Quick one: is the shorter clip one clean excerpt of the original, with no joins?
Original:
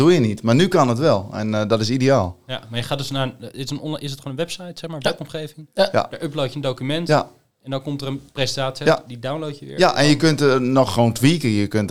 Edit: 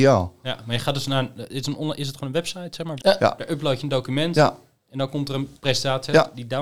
no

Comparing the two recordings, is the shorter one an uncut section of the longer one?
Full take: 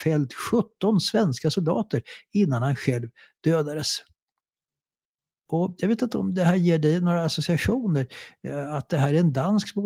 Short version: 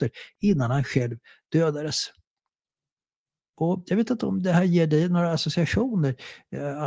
yes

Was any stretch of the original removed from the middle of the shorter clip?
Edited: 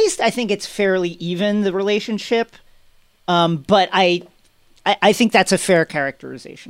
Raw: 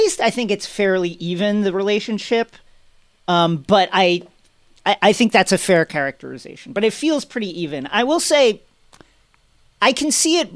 no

